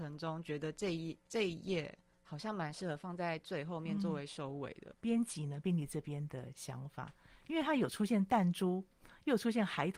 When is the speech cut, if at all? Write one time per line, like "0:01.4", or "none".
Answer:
0:04.9